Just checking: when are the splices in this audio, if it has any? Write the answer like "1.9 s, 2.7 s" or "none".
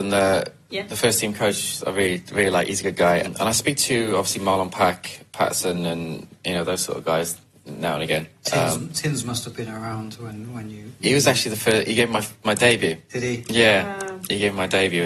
3.2 s